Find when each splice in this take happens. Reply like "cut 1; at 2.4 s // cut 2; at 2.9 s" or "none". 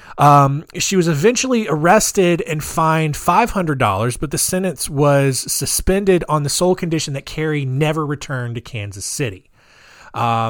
none